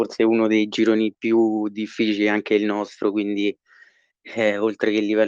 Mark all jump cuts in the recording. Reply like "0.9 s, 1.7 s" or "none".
none